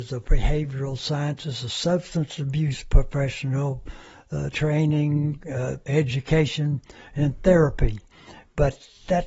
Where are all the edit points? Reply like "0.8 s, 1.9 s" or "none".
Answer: 4.5 s, 5.9 s